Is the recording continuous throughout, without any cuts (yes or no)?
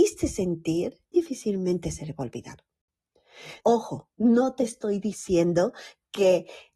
no